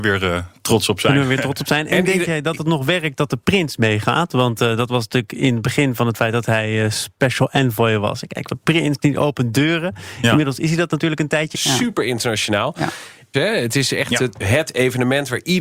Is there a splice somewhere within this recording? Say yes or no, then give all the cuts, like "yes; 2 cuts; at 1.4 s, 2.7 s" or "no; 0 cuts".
yes; 3 cuts; at 8.5 s, 11.5 s, 13.3 s